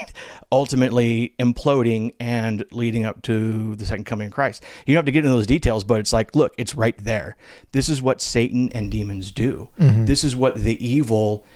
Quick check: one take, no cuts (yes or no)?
yes